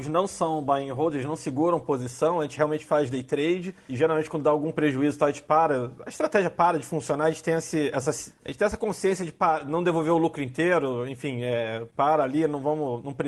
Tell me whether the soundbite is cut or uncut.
uncut